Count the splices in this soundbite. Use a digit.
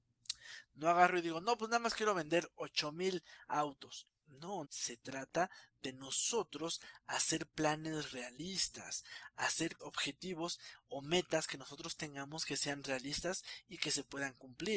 2